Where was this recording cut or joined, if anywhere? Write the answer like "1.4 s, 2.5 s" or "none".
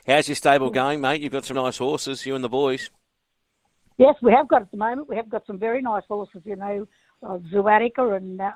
1.5 s